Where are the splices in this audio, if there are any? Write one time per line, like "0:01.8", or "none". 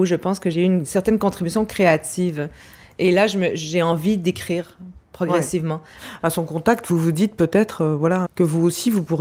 0:06.2
0:08.2

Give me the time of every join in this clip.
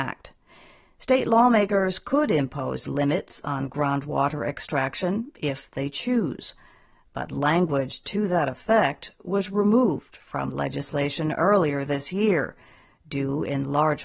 none

